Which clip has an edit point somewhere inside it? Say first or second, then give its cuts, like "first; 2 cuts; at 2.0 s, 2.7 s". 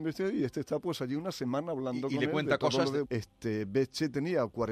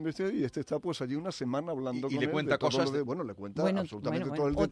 first; 1 cut; at 3.0 s